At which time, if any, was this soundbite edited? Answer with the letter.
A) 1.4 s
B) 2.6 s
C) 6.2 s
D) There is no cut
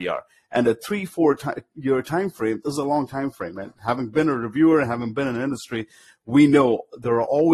B